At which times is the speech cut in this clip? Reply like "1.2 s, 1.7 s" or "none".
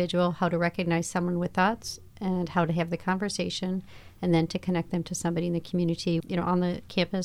6.2 s